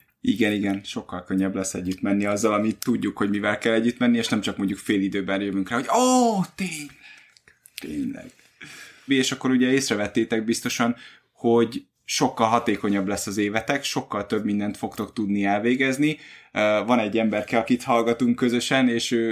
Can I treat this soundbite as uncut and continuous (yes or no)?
no